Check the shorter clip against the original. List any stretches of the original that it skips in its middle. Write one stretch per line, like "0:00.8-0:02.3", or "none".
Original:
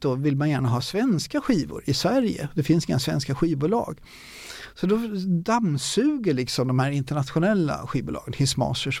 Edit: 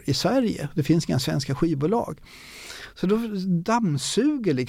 none